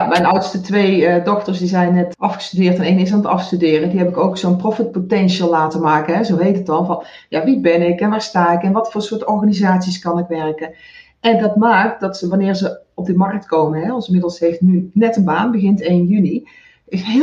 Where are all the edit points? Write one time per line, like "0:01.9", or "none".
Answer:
0:02.1